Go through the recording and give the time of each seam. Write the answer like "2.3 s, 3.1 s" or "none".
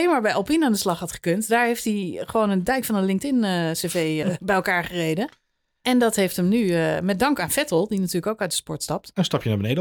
4.2 s

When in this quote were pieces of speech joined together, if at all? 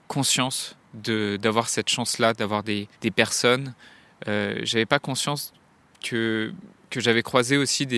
2.9 s

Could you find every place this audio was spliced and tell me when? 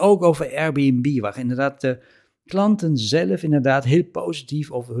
none

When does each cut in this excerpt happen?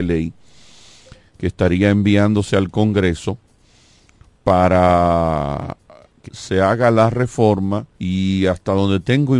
6.2 s, 7.9 s

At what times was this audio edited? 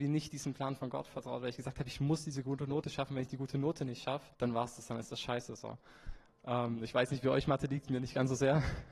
4.3 s, 6.3 s

